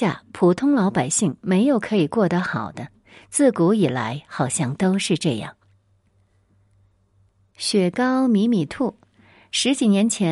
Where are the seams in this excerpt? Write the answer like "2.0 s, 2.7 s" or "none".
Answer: none